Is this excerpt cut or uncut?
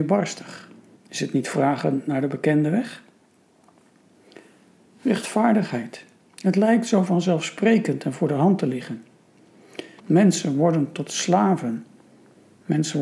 cut